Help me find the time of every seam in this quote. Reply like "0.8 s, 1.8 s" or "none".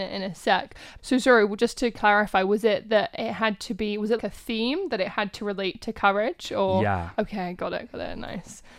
1.0 s, 4.2 s